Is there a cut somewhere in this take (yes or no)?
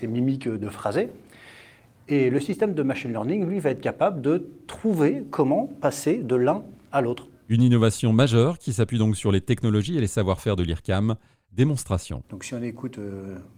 no